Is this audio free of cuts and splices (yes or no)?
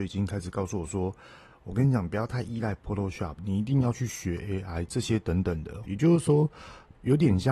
no